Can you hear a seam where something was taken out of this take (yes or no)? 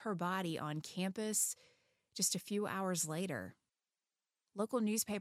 no